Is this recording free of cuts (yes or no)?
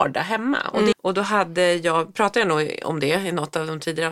no